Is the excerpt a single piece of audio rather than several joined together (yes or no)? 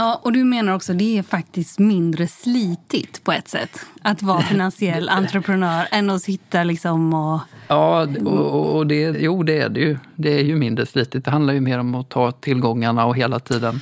no